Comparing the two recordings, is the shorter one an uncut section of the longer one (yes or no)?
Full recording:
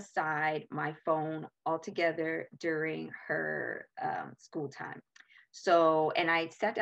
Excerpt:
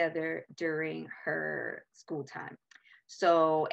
no